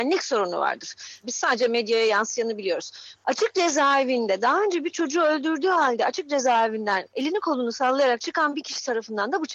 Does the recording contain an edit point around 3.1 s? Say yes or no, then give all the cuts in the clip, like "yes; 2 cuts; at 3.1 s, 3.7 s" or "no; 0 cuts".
yes; 2 cuts; at 1.2 s, 3.1 s